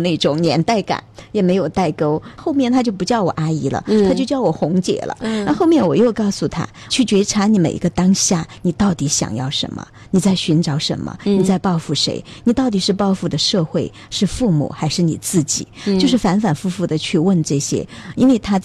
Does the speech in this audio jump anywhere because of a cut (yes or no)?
yes